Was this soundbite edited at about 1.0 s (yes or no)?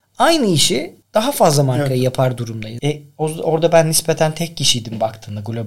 yes